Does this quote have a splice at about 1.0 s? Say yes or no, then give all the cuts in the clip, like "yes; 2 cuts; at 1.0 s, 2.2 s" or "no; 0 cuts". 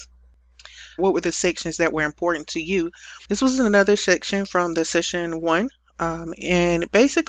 yes; 2 cuts; at 1.0 s, 3.2 s